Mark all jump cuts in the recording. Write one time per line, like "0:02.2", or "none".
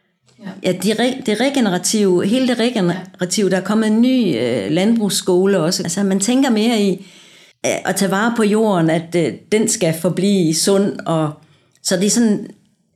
0:05.8
0:07.5